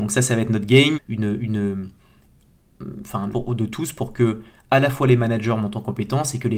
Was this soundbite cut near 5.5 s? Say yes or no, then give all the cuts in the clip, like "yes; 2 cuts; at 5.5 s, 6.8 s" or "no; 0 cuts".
no; 2 cuts; at 0.9 s, 3.3 s